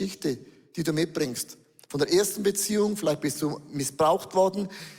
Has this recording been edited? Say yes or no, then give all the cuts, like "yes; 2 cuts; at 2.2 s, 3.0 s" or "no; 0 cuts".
no; 0 cuts